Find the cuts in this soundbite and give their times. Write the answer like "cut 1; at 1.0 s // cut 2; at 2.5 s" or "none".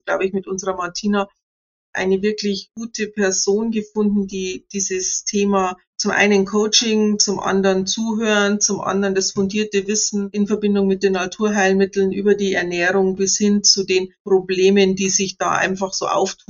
none